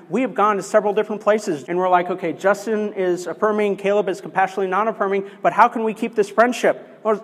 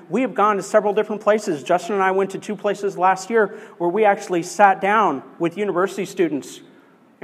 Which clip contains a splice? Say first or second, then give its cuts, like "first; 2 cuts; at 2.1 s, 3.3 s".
first; 1 cut; at 1.6 s